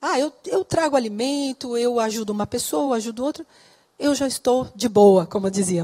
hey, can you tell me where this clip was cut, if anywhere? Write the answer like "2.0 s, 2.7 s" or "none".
none